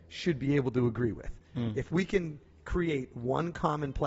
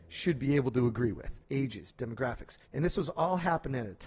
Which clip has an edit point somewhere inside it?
second; 2 cuts; at 1.4 s, 2.6 s

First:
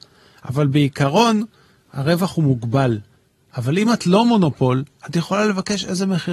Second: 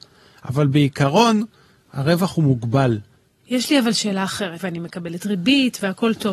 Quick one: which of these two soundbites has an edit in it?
second; 2 cuts; at 3.4 s, 4.6 s

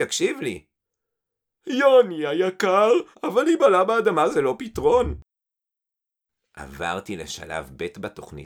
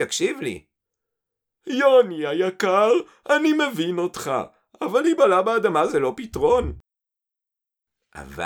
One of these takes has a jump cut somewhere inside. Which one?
first; 1 cut; at 3.1 s

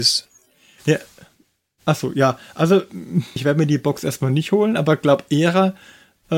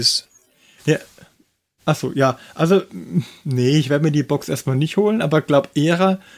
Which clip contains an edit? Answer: first; 1 cut; at 3.4 s

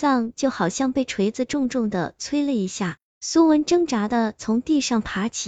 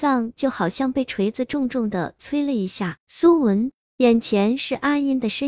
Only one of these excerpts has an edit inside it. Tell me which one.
second; 1 cut; at 3.0 s

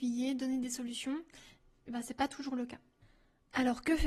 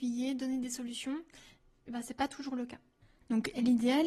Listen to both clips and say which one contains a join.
second; 1 cut; at 3.2 s

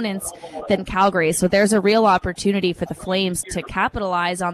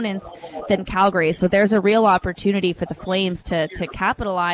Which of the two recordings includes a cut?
first; 1 cut; at 3.4 s

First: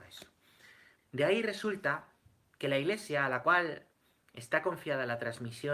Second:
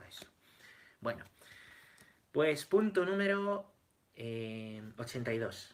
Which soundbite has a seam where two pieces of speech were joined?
first; 1 cut; at 1.0 s

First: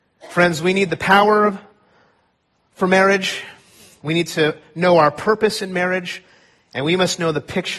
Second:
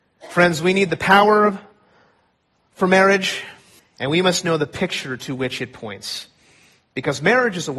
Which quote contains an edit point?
second; 1 cut; at 3.8 s

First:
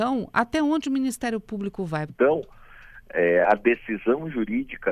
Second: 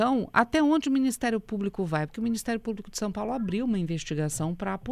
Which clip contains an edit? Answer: first; 2 cuts; at 2.1 s, 3.4 s

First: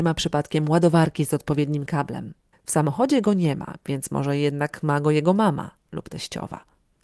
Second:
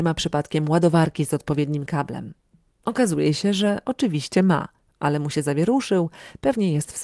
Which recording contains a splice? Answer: first; 1 cut; at 2.5 s

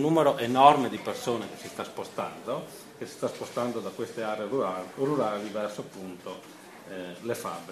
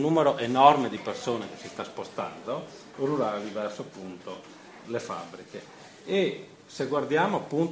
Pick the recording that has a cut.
second; 2 cuts; at 2.9 s, 4.8 s

